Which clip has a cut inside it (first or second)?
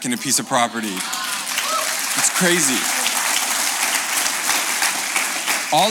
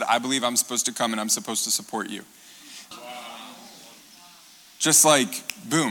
second